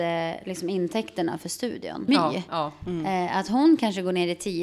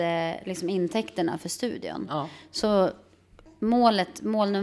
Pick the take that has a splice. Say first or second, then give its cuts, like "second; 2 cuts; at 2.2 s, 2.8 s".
first; 1 cut; at 2.1 s